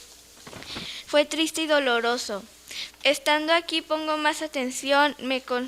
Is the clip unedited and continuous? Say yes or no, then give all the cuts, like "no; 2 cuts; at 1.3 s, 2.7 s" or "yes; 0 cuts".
no; 2 cuts; at 1.1 s, 2.9 s